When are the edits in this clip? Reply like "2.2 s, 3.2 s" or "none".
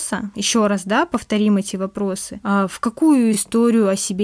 none